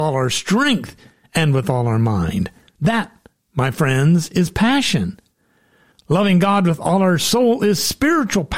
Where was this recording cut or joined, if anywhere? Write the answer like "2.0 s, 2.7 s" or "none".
5.9 s